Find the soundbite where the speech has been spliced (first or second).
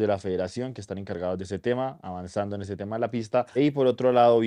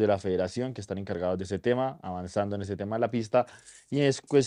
first